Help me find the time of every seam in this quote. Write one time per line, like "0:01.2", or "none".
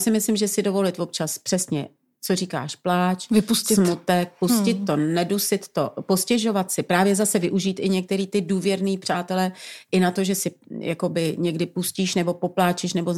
none